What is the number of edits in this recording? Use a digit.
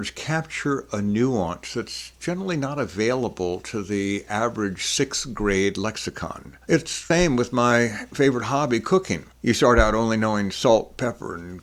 0